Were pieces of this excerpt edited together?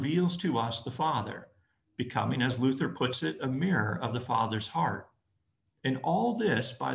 no; 0 cuts

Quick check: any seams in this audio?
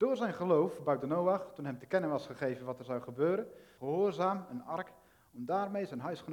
yes; 1 cut; at 3.8 s

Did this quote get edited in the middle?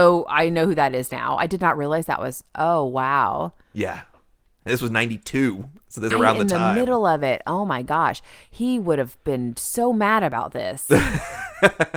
yes; 1 cut; at 6.1 s

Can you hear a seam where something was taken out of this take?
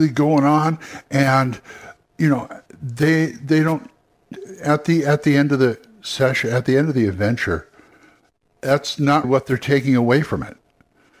yes; 1 cut; at 9.2 s

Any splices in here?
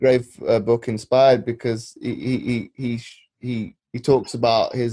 yes; 1 cut; at 3.8 s

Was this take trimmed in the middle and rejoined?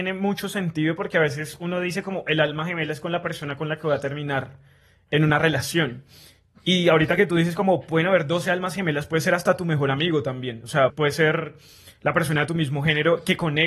yes; 1 cut; at 10.9 s

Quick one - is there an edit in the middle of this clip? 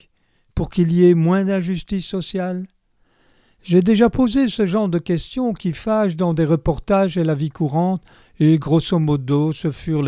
no; 0 cuts

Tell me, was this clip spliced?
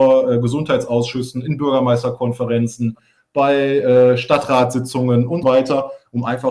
yes; 1 cut; at 5.4 s

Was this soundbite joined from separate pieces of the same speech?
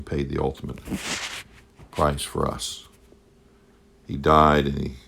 no; 0 cuts

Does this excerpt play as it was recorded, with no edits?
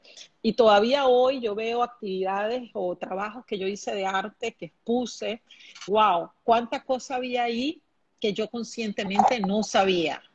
no; 1 cut; at 5.9 s

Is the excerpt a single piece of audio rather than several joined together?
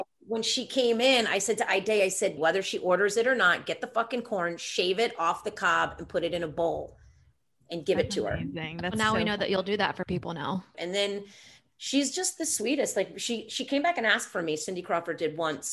no; 2 cuts; at 2.4 s, 10.7 s

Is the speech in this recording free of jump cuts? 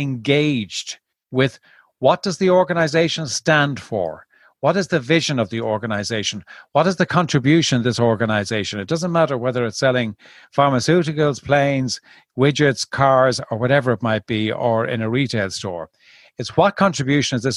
yes; 0 cuts

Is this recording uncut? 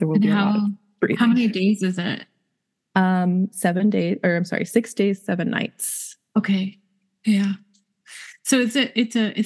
yes; 0 cuts

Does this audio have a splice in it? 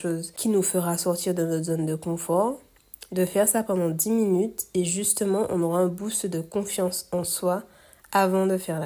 no; 0 cuts

